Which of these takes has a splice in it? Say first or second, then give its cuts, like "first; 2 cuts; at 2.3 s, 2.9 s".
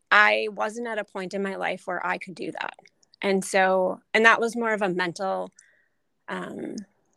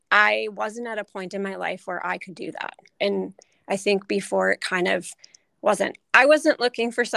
second; 1 cut; at 3.0 s